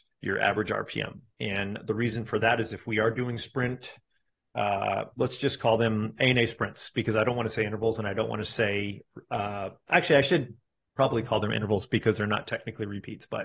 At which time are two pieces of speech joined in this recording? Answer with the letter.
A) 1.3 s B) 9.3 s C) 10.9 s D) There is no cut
A